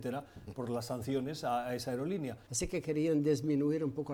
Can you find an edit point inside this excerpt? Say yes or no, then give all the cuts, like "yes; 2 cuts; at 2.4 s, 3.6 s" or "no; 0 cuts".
yes; 1 cut; at 2.5 s